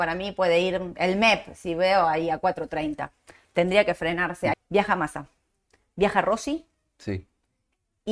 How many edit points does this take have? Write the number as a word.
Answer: one